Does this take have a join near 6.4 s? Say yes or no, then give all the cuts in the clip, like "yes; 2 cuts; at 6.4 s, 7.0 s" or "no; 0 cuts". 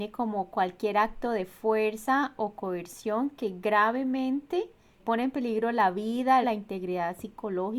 yes; 2 cuts; at 5.0 s, 6.4 s